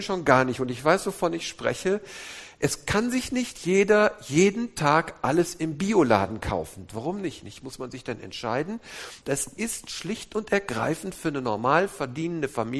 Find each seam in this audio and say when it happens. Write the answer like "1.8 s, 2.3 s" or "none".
6.9 s, 9.2 s